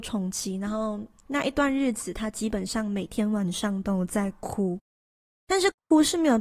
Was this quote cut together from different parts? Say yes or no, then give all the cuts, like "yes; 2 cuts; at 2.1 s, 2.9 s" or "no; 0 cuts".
no; 0 cuts